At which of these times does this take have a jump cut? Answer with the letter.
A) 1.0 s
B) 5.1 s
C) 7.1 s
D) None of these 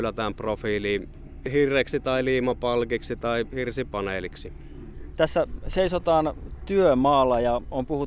B